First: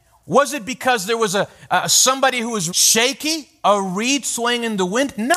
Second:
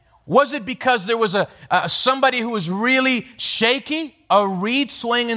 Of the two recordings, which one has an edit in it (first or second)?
first